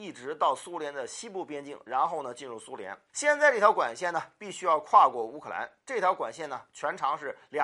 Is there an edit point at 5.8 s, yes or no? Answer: no